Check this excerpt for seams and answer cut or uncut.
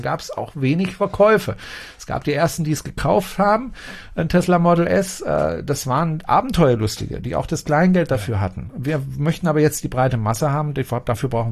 uncut